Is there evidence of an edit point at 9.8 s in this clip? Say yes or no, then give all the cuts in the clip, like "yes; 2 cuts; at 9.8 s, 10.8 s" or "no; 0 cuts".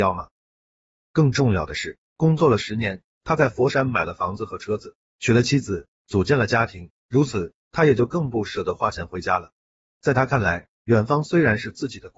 no; 1 cut; at 5.1 s